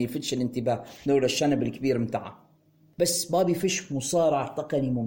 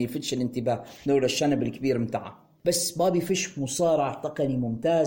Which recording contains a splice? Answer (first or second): second